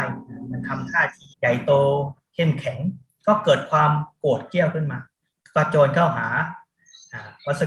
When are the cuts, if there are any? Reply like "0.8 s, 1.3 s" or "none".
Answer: 1.3 s